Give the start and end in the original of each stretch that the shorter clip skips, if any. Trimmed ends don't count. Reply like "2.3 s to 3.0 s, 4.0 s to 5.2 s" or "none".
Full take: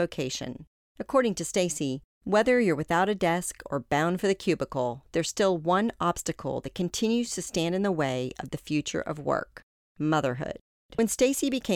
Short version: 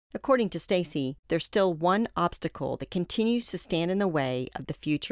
2.1 s to 5.1 s

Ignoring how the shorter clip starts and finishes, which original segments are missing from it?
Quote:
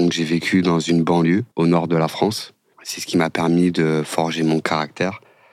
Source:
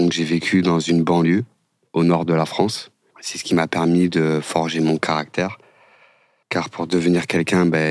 1.5 s to 1.9 s

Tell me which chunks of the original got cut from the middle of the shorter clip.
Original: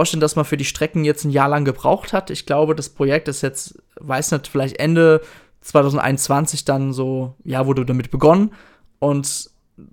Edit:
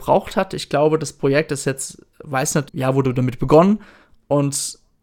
4.4 s to 7.4 s

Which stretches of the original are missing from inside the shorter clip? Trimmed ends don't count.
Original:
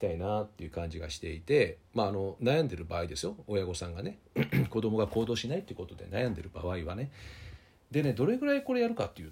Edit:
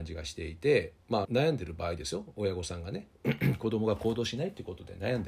2.1 s to 2.4 s

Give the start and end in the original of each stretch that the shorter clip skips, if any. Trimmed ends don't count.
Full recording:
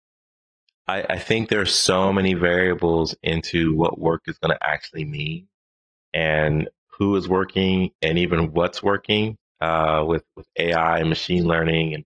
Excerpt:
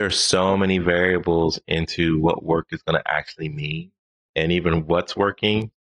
5.8 s to 7.9 s

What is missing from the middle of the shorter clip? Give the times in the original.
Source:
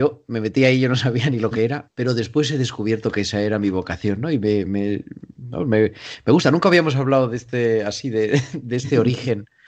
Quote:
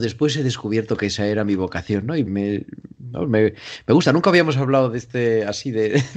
4.4 s to 4.6 s

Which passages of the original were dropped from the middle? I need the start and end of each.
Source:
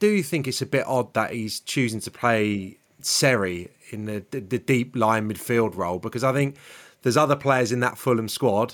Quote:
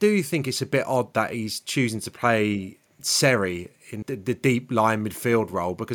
4.0 s to 4.3 s

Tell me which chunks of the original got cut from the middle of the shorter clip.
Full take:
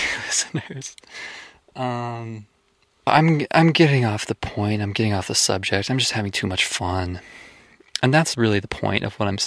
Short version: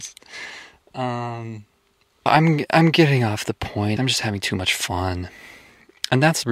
4.8 s to 5.9 s

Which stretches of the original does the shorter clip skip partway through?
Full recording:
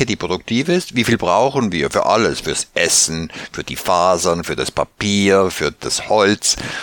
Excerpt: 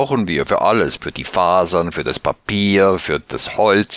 2.4 s to 3.5 s

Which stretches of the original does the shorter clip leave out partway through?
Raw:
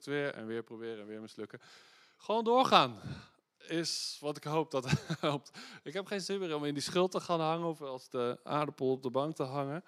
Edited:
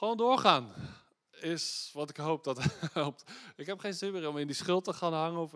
none

